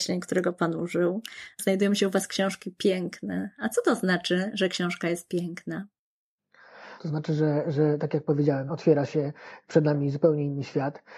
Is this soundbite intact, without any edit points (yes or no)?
no